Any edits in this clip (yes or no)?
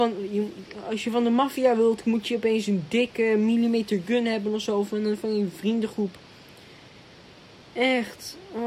no